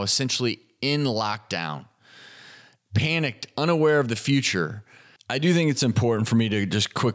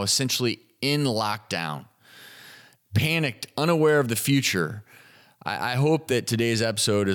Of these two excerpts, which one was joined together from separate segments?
first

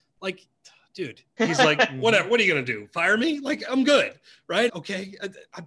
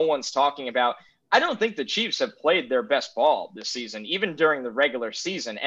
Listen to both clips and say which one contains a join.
first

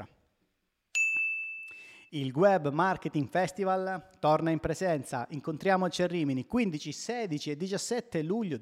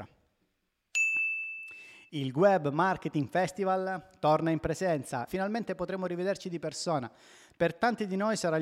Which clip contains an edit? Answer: second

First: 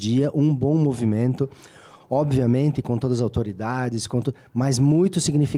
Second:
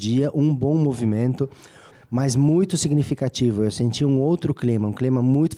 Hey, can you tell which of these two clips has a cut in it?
second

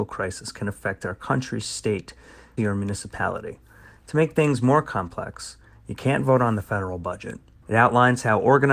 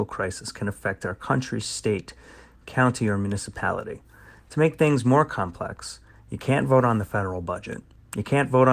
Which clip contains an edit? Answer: first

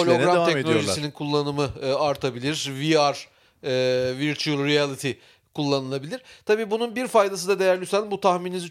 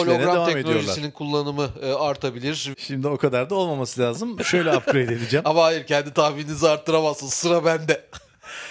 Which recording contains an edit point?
second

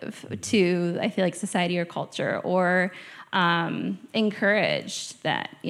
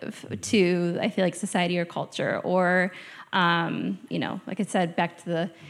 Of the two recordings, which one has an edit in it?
second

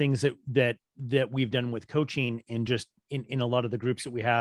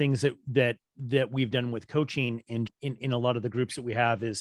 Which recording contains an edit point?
second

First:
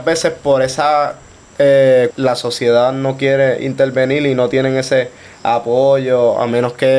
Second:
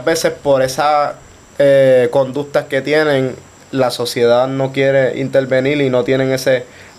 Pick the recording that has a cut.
first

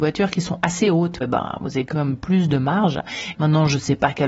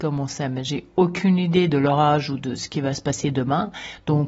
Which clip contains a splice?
first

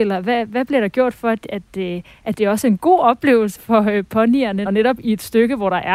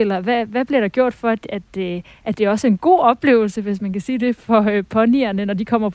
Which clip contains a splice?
first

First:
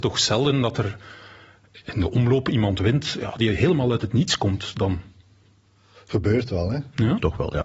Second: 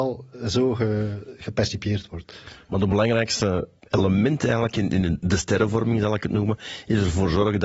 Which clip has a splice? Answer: first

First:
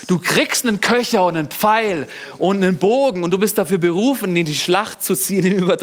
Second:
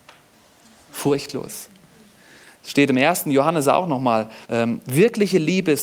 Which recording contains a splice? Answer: second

